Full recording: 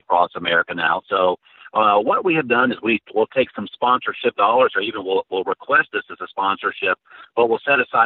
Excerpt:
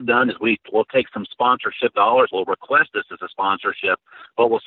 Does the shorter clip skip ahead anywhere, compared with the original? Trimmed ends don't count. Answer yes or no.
yes